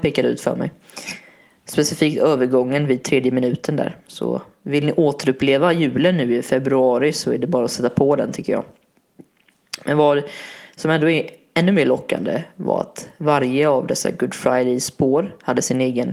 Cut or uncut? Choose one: uncut